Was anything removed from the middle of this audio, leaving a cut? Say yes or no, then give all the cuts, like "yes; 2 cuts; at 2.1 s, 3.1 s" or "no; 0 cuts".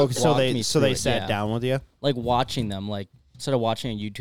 no; 0 cuts